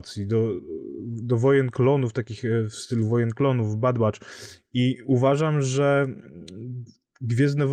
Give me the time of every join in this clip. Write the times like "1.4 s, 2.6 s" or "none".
none